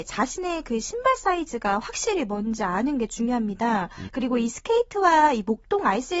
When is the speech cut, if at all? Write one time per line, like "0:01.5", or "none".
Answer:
0:04.1